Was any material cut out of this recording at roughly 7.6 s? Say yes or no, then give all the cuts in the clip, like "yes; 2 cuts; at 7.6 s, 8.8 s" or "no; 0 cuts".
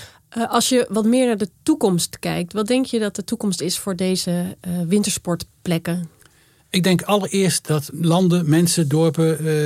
yes; 1 cut; at 7.6 s